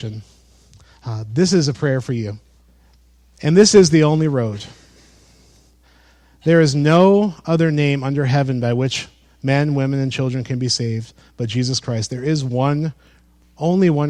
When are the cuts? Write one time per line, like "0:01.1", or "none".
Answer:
none